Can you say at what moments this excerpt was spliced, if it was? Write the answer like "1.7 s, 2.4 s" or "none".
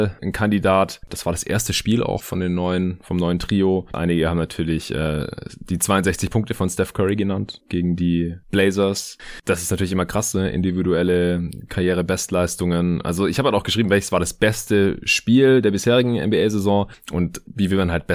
1.1 s, 3.9 s